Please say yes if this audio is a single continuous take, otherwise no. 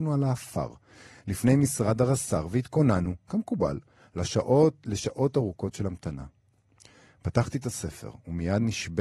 yes